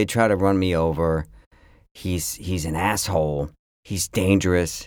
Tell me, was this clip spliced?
yes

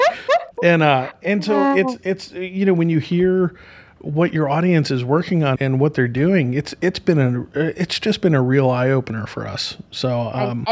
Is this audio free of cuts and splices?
no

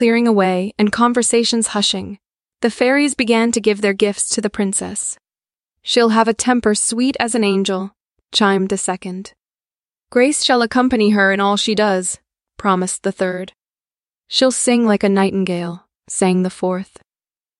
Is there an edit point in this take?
yes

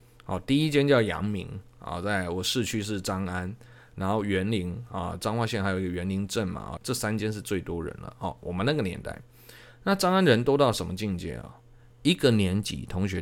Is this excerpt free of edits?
no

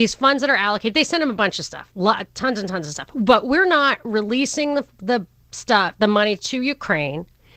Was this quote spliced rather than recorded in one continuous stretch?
no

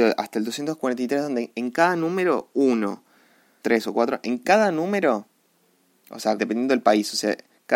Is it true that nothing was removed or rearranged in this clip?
no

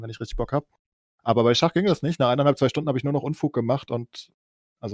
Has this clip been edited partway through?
no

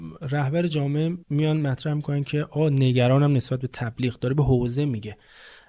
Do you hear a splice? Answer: yes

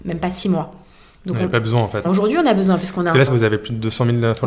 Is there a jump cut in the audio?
yes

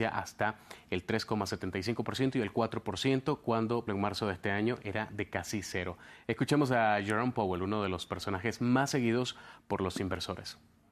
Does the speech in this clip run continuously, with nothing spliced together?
no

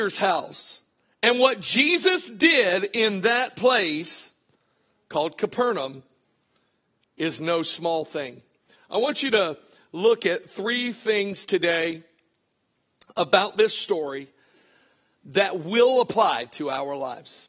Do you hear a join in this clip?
no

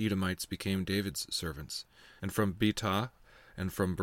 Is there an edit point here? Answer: yes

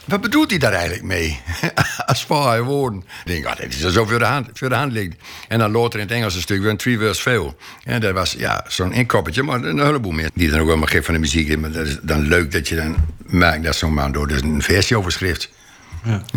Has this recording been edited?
yes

